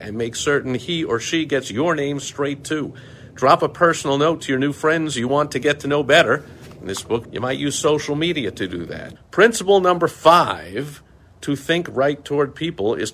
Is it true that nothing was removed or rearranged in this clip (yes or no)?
no